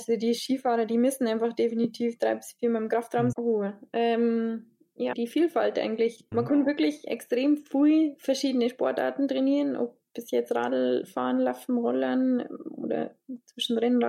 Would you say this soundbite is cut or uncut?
cut